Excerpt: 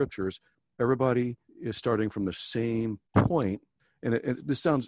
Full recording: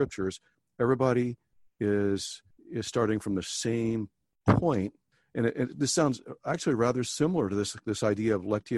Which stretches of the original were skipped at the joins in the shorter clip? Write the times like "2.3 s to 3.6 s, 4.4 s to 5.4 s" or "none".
1.5 s to 2.6 s, 4.2 s to 4.4 s